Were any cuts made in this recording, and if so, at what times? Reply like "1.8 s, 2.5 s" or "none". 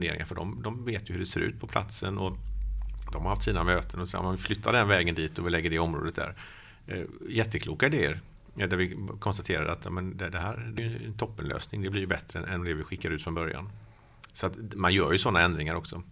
none